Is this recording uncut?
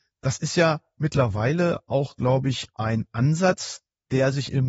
yes; 0 cuts

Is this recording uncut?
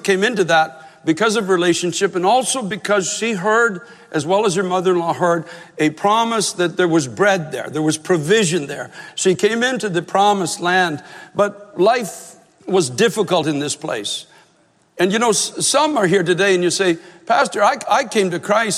yes; 0 cuts

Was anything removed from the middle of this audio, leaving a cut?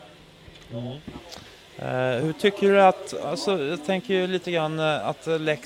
no; 0 cuts

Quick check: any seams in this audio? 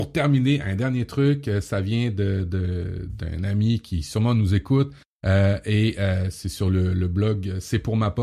no; 0 cuts

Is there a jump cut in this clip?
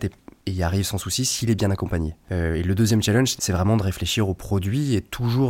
yes; 1 cut; at 3.4 s

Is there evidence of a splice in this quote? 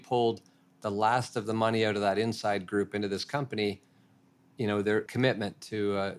yes; 1 cut; at 5.1 s

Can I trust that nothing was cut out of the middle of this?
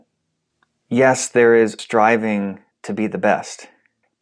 no; 1 cut; at 1.8 s

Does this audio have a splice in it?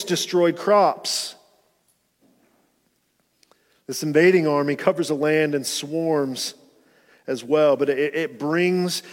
no; 0 cuts

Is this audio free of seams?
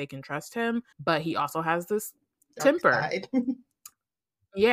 no; 1 cut; at 0.9 s

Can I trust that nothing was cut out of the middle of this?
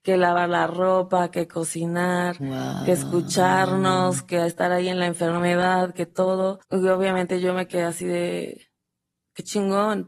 no; 1 cut; at 6.6 s

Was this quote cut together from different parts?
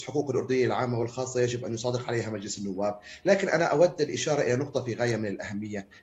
no; 0 cuts

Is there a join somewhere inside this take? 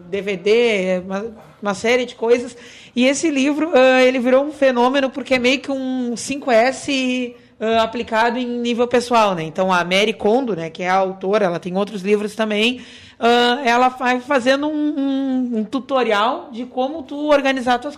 no; 0 cuts

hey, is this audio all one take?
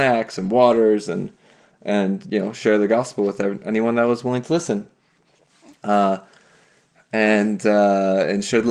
yes; 0 cuts

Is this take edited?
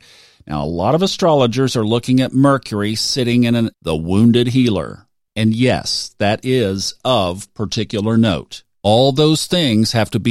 yes; 2 cuts; at 3.7 s, 8.7 s

